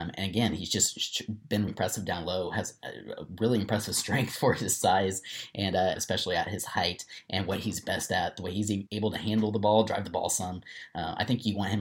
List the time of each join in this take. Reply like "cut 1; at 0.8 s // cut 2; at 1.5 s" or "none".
cut 1; at 1.7 s // cut 2; at 6.0 s // cut 3; at 8.9 s

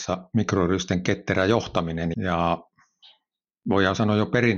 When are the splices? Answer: cut 1; at 2.1 s

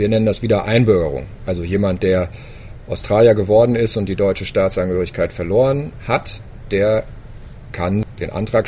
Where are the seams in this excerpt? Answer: none

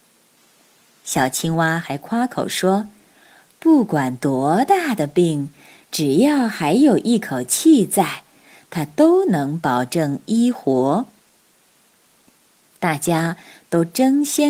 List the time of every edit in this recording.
none

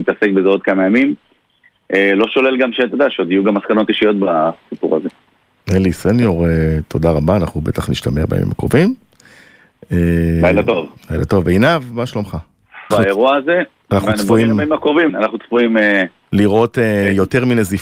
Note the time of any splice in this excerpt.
cut 1; at 12.9 s // cut 2; at 15.1 s

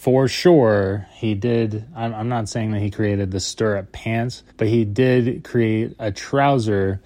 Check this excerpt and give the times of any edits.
cut 1; at 4.5 s

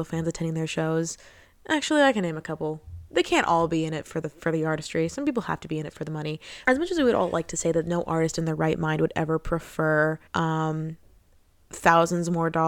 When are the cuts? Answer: cut 1; at 6.6 s // cut 2; at 10.3 s

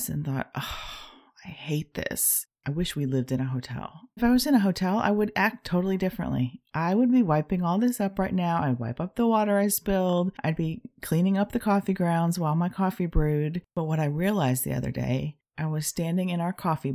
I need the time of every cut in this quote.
cut 1; at 4.2 s // cut 2; at 13.6 s

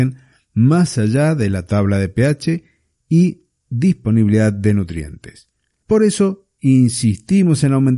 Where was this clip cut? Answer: cut 1; at 5.8 s

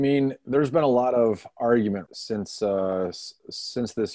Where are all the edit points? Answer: cut 1; at 2.1 s

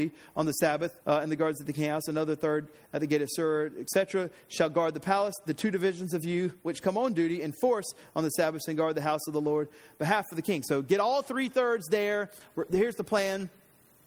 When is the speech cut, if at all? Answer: cut 1; at 1.0 s

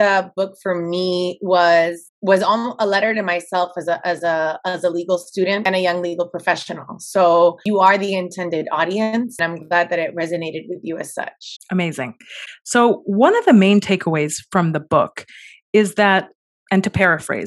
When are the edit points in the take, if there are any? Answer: none

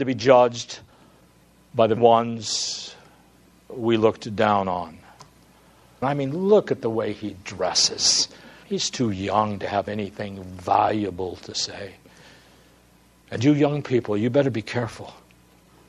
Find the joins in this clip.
cut 1; at 2.0 s // cut 2; at 6.0 s // cut 3; at 8.6 s

